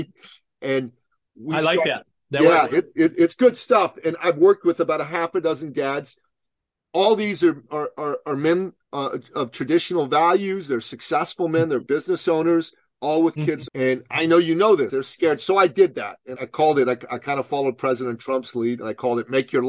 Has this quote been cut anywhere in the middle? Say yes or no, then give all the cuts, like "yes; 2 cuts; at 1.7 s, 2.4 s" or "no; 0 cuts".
yes; 3 cuts; at 13.7 s, 14.9 s, 16.4 s